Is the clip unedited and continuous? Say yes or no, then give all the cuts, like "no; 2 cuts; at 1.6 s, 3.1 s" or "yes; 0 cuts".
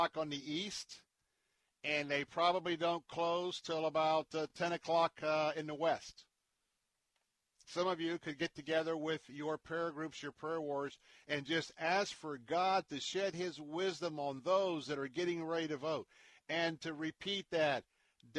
yes; 0 cuts